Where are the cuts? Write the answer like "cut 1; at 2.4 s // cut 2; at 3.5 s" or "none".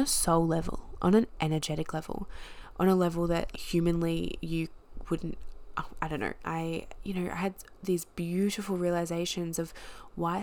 cut 1; at 3.5 s // cut 2; at 6.4 s